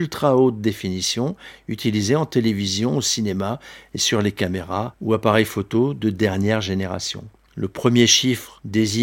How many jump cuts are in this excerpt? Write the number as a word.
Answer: one